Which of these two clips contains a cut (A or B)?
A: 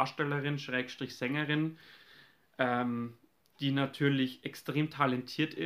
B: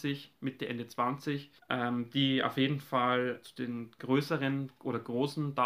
B